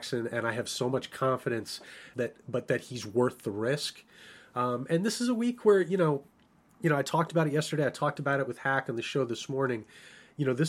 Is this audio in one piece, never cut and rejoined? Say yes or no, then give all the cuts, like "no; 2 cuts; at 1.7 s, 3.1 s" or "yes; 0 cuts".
no; 1 cut; at 2.1 s